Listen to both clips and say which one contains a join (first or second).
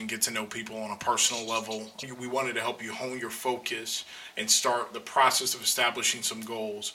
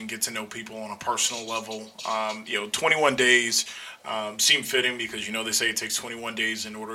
first